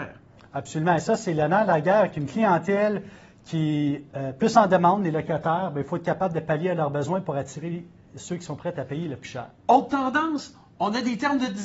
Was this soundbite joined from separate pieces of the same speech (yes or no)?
no